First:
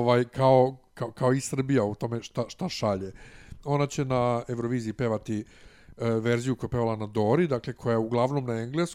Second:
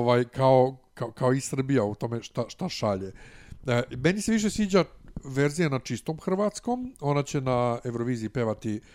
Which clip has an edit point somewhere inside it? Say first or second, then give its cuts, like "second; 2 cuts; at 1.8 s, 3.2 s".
first; 1 cut; at 3.6 s